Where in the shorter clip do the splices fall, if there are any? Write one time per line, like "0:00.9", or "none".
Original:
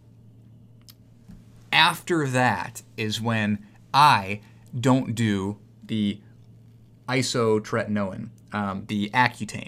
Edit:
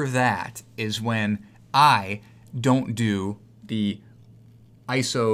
none

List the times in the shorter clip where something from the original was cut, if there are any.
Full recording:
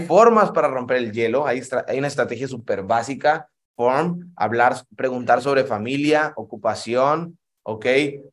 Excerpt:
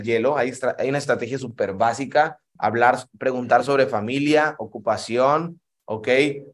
0:02.6

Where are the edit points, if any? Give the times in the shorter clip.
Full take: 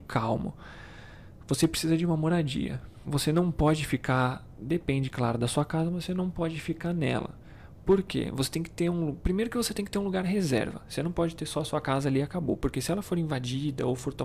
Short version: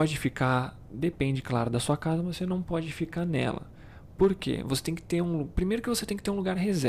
none

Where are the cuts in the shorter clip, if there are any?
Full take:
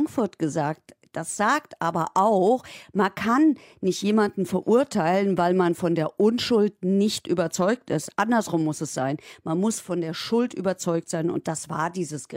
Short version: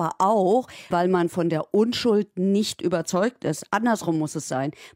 0:00.9

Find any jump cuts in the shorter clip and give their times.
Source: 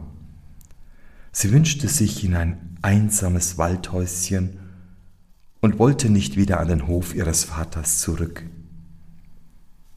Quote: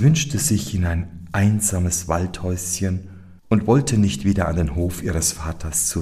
0:03.4

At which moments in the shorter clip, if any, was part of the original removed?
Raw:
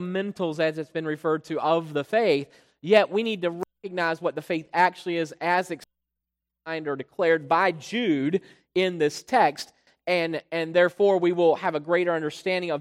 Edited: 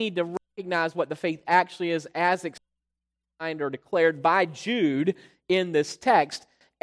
none

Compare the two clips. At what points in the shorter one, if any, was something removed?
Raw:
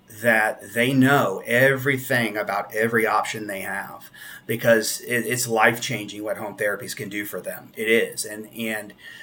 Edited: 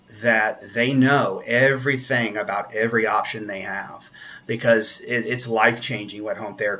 none

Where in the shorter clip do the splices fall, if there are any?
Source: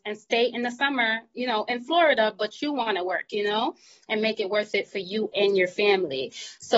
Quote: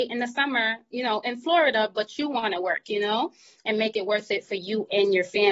none

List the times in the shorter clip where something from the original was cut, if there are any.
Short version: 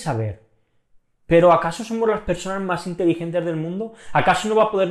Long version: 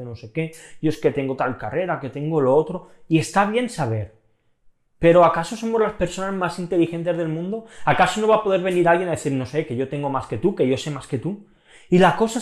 none

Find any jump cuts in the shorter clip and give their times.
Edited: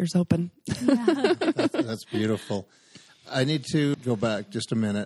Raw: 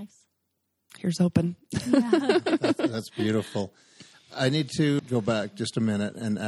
none

